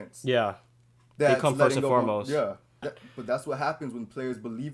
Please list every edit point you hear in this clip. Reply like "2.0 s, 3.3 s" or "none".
2.8 s

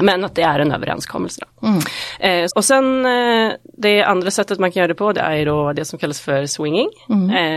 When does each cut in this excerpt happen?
2.5 s

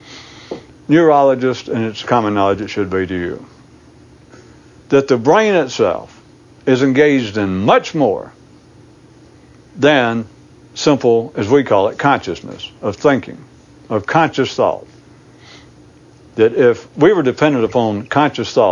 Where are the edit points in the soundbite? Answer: none

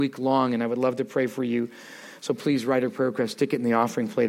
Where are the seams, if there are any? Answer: none

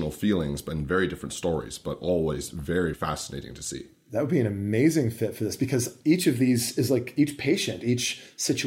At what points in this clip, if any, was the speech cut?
2.9 s

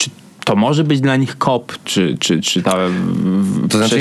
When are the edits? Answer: none

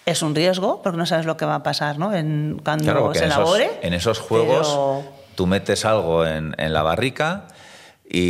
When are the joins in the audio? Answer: none

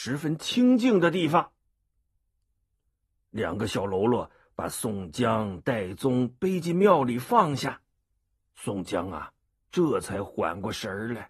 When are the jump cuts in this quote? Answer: none

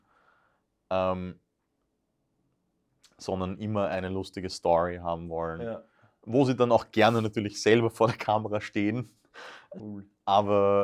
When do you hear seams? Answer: 9.8 s

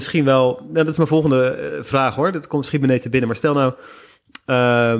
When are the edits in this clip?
none

